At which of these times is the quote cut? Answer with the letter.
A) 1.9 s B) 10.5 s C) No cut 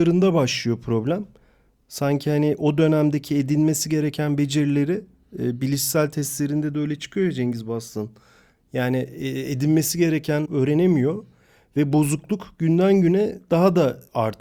B